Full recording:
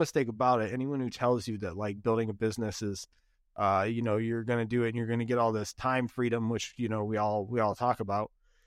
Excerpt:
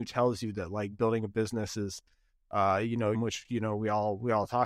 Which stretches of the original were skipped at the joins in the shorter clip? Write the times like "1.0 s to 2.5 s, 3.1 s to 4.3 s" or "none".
4.2 s to 6.4 s